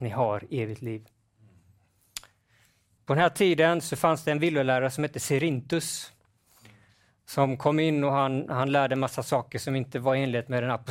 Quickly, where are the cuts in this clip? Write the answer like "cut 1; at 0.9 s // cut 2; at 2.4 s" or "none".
cut 1; at 3.0 s